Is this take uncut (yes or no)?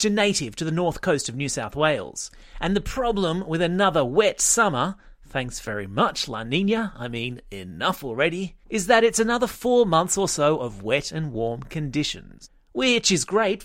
no